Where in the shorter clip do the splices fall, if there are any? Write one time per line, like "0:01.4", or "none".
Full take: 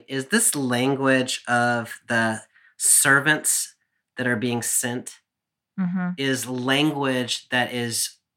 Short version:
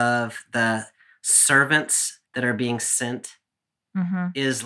0:02.2